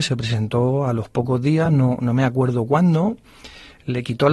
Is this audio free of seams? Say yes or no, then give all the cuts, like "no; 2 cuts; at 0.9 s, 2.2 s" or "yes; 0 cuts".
yes; 0 cuts